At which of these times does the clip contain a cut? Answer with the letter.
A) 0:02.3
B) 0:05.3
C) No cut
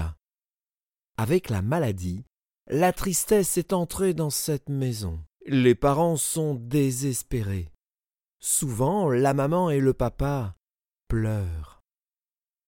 B